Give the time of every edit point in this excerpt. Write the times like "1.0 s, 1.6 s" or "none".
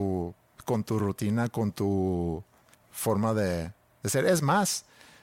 none